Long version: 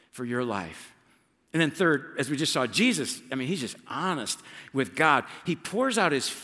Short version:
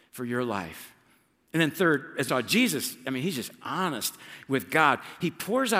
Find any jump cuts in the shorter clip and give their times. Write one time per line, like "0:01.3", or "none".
0:02.3

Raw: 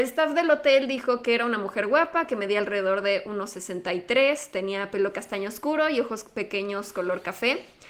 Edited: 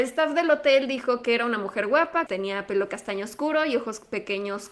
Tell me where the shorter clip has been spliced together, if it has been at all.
0:02.3

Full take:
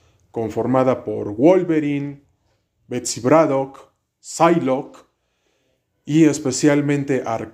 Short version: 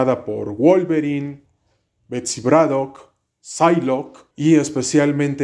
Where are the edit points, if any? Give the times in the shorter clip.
0:04.3

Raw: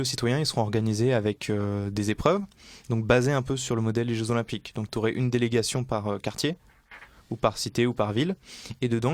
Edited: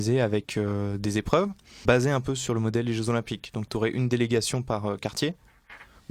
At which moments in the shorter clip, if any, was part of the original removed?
0:01.9

